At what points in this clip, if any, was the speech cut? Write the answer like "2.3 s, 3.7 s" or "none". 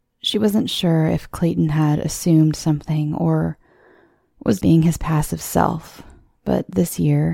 4.6 s